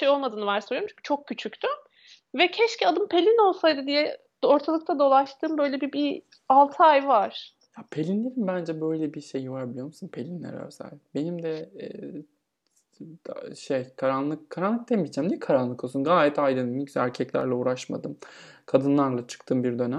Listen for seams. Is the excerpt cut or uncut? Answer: uncut